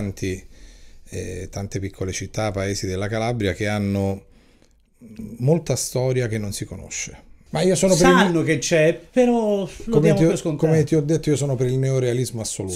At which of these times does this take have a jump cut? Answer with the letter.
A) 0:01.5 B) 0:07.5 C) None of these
B